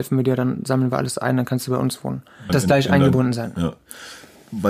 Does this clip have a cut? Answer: yes; 1 cut; at 2.5 s

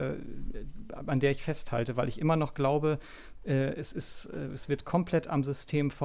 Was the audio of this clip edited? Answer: no; 0 cuts

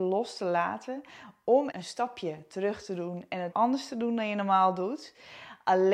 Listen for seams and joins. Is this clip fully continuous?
no; 2 cuts; at 1.7 s, 3.5 s

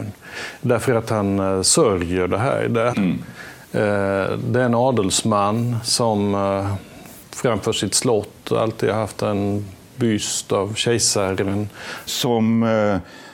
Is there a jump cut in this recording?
yes; 2 cuts; at 2.9 s, 12.1 s

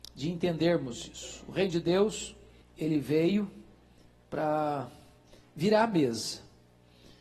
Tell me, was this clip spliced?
yes; 1 cut; at 2.6 s

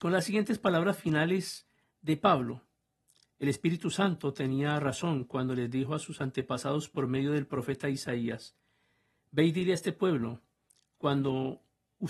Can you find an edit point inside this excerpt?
no; 0 cuts

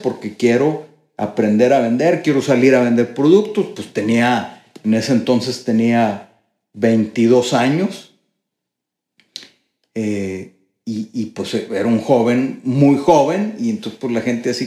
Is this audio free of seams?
yes; 0 cuts

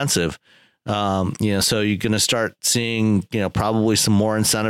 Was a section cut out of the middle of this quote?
no; 0 cuts

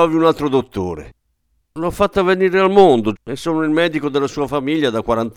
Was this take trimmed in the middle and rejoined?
yes; 1 cut; at 3.1 s

